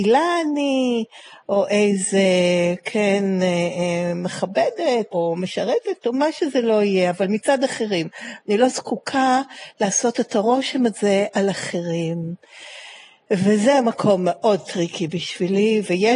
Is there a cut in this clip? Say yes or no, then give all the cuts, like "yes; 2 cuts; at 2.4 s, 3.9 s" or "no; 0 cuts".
yes; 2 cuts; at 5.1 s, 8.4 s